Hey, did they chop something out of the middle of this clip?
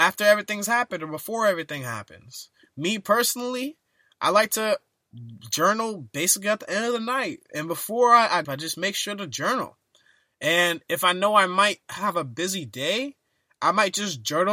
yes; 1 cut; at 8.4 s

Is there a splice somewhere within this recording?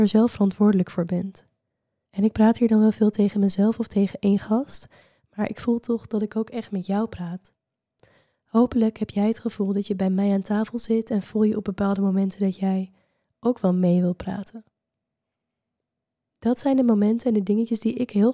yes; 1 cut; at 2.1 s

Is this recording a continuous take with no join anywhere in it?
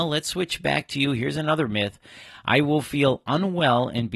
yes; 0 cuts

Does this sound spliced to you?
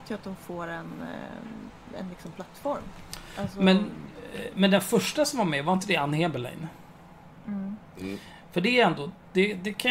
no; 0 cuts

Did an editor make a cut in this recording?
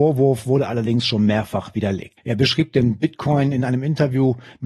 yes; 1 cut; at 2.2 s

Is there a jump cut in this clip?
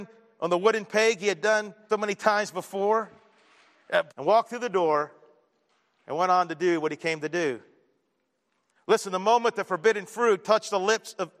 yes; 3 cuts; at 1.9 s, 4.1 s, 8.7 s

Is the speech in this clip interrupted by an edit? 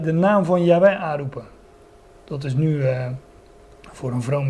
no; 0 cuts

